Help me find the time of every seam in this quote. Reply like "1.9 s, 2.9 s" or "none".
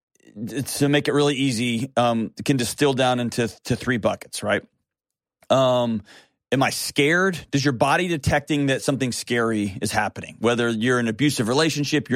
none